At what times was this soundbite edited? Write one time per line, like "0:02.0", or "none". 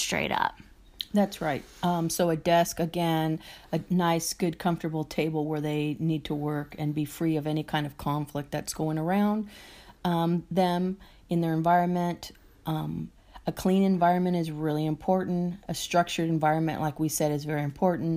none